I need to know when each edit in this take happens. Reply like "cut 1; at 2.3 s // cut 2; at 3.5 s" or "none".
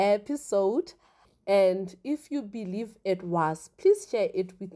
cut 1; at 1.3 s